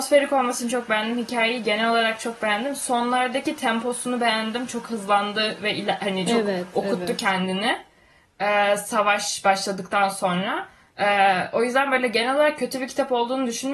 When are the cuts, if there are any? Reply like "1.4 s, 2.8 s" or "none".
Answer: none